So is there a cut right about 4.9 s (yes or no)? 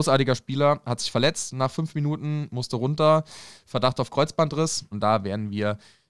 yes